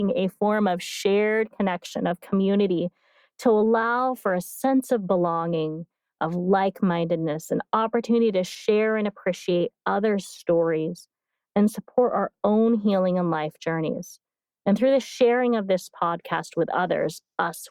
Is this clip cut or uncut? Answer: uncut